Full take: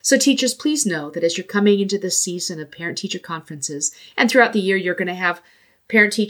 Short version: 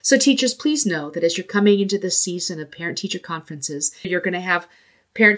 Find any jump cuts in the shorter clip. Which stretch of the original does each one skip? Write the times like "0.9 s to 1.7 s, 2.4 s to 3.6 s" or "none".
4.0 s to 4.8 s